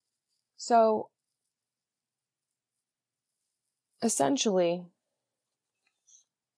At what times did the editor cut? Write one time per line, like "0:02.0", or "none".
none